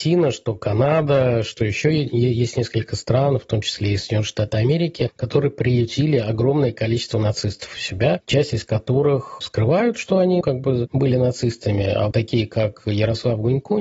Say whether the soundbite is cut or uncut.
cut